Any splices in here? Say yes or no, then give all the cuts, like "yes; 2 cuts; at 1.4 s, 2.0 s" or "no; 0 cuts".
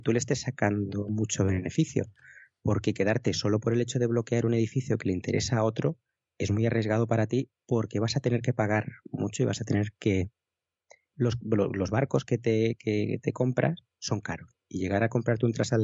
no; 0 cuts